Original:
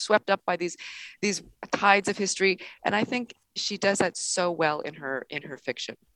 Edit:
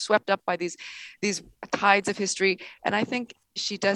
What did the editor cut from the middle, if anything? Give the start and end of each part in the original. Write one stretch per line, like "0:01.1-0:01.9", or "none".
none